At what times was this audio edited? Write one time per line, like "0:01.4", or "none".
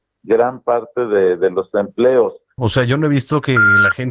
0:02.6